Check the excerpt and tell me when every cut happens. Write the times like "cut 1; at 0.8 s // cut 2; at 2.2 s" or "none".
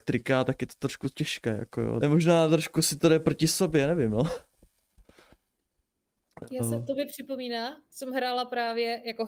cut 1; at 2.0 s